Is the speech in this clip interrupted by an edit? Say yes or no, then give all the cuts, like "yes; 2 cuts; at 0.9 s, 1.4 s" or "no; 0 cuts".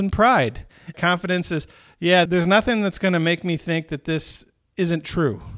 yes; 2 cuts; at 0.9 s, 2.3 s